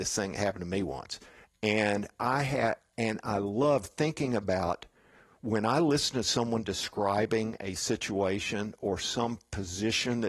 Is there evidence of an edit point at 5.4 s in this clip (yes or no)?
no